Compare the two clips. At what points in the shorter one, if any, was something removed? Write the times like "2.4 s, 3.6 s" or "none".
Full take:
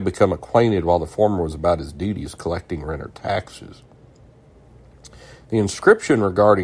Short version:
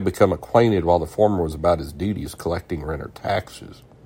none